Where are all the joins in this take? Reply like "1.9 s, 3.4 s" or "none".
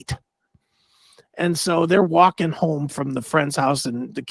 none